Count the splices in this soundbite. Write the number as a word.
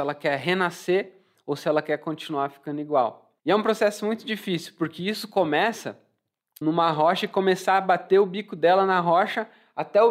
two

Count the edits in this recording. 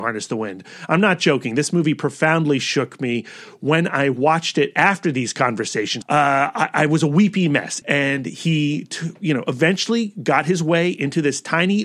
two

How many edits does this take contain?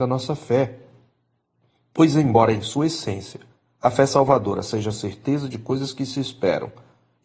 zero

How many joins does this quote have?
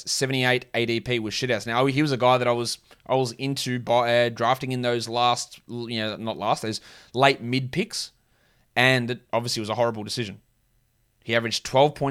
zero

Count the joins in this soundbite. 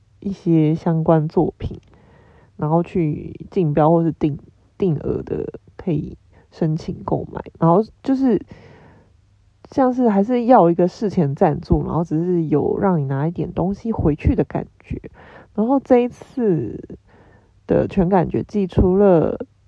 zero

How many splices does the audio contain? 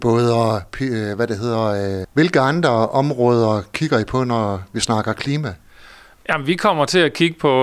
one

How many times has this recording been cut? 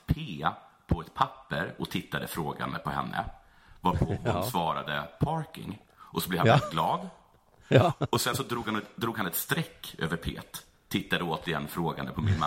zero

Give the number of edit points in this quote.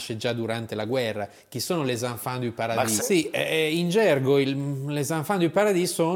one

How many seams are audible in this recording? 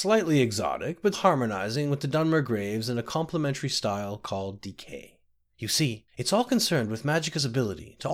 two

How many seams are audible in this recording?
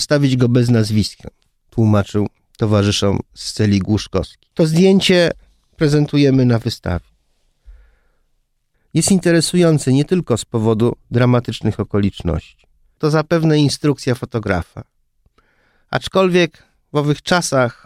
two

